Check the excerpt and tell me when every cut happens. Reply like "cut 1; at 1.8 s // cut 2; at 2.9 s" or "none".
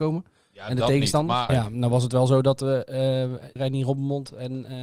cut 1; at 1.5 s // cut 2; at 3.6 s